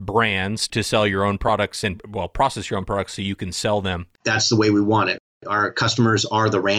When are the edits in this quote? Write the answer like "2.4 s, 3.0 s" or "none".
4.2 s